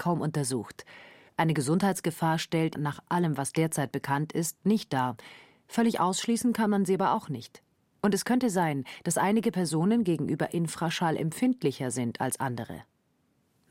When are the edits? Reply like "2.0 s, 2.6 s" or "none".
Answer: 2.7 s